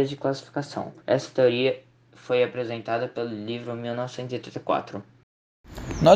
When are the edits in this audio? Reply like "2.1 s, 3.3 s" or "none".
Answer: 1.0 s